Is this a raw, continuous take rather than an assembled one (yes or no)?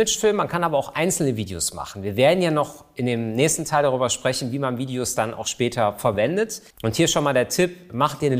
no